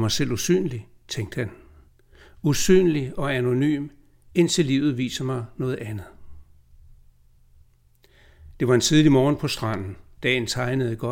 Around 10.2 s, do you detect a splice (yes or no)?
yes